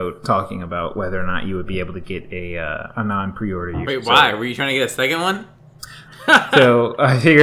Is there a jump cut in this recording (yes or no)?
yes